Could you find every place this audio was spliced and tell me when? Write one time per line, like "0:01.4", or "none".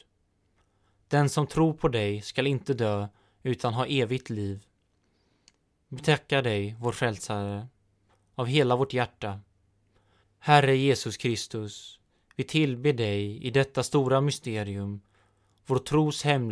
0:10.2